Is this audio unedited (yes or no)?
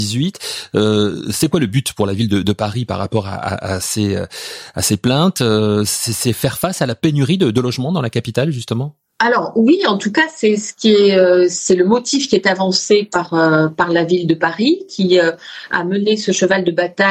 yes